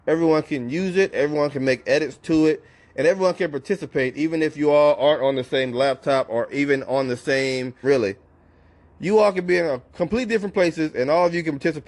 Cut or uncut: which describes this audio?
cut